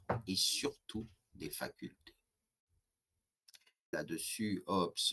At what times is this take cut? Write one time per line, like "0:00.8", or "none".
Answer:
0:03.9